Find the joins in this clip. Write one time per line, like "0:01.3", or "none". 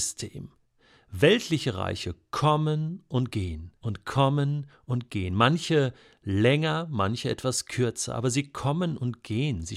0:03.8